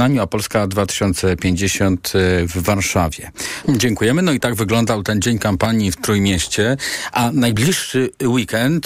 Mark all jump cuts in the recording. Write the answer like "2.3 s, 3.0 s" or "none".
3.6 s